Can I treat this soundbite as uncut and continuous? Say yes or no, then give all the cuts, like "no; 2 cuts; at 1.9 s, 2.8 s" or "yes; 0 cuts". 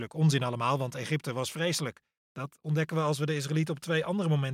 no; 1 cut; at 2.2 s